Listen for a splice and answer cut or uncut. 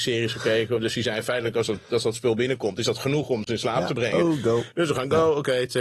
uncut